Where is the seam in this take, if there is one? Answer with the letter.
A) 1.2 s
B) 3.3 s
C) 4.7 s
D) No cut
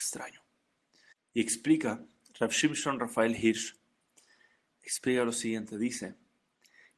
D